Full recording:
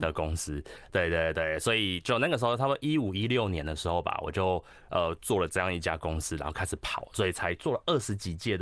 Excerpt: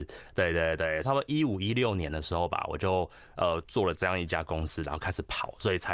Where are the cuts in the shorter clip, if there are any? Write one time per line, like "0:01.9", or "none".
0:01.0